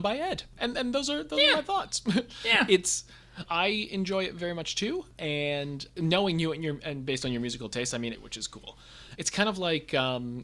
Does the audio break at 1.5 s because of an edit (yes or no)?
no